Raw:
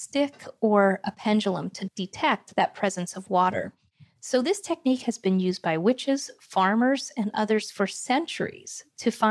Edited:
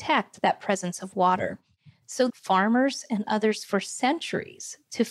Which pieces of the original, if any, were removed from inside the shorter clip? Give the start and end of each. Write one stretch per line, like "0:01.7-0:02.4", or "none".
0:04.4-0:06.4